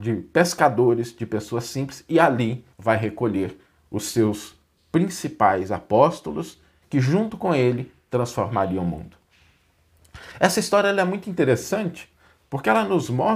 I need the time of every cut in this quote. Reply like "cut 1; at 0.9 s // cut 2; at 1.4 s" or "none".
cut 1; at 2.7 s // cut 2; at 6.8 s